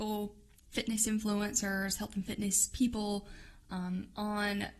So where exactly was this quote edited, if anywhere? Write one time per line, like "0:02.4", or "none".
none